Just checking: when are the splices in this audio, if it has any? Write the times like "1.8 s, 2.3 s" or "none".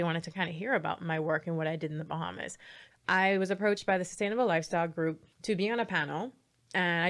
2.9 s, 5.3 s